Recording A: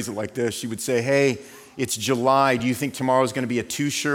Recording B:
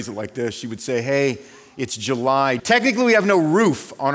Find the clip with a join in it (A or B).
B